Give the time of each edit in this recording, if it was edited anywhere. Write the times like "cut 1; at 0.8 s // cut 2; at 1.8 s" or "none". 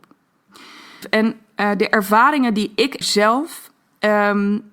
cut 1; at 1.0 s // cut 2; at 3.0 s